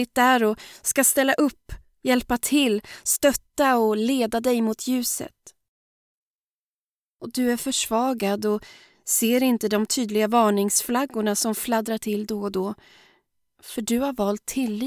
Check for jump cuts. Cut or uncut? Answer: uncut